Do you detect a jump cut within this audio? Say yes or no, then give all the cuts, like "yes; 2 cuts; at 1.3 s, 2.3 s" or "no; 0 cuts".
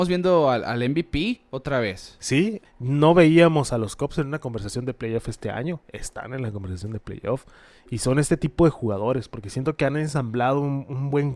yes; 1 cut; at 2.6 s